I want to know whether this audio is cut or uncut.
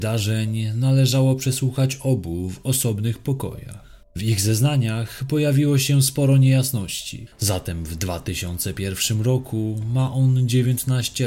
cut